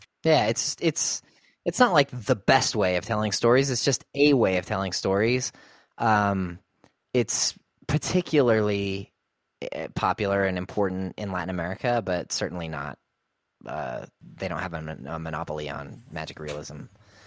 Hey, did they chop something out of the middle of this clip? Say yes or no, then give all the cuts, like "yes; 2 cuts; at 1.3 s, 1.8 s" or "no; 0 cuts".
no; 0 cuts